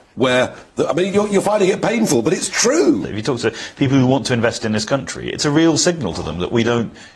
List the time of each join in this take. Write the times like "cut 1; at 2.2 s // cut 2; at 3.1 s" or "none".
cut 1; at 3.0 s